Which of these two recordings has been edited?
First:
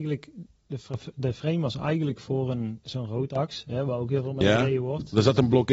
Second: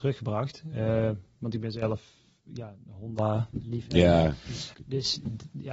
second; 2 cuts; at 3.6 s, 4.8 s

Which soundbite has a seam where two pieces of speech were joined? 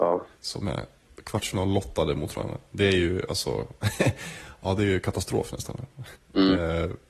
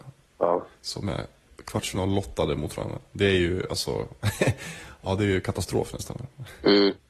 first; 1 cut; at 6.1 s

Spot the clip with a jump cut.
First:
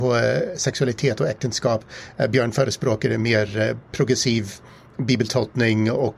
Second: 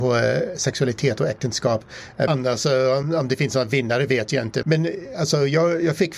second; 2 cuts; at 2.3 s, 4.6 s

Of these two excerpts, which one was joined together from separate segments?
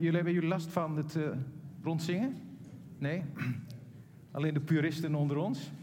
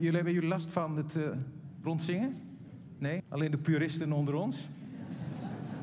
second; 1 cut; at 3.2 s

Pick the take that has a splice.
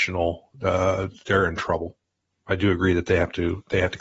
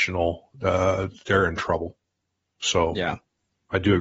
first; 1 cut; at 2.3 s

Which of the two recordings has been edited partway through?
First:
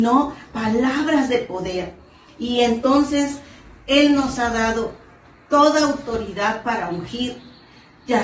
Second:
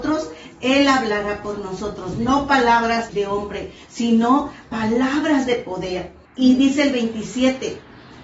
second; 2 cuts; at 3.1 s, 6.3 s

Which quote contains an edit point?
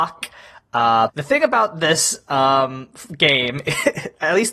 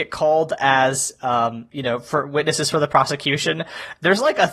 first; 1 cut; at 1.1 s

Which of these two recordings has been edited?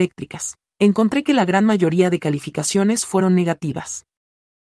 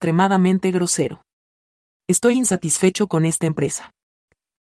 second; 1 cut; at 2.3 s

